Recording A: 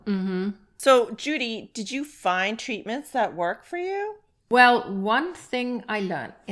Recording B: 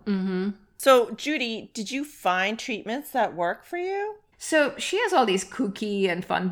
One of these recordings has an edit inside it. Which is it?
B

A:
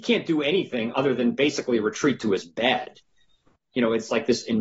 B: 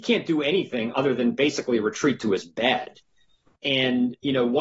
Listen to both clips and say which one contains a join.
A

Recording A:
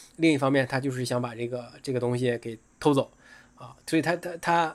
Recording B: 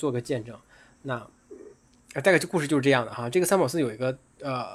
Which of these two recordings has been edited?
A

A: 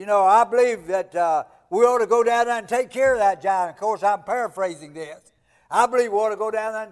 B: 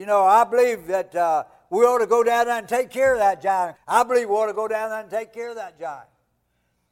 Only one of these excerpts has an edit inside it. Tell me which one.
B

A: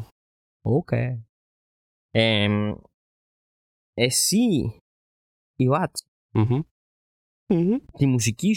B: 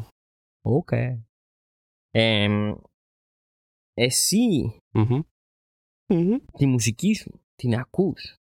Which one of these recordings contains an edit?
B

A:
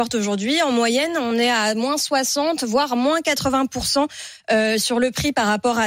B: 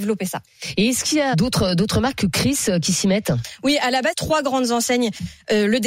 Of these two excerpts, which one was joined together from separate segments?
B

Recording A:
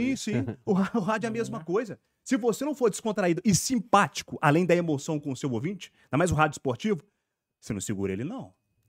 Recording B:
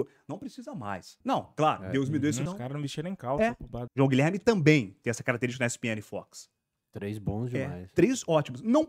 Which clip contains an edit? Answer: B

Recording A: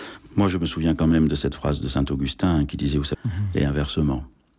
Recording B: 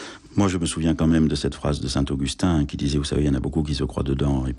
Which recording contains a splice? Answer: A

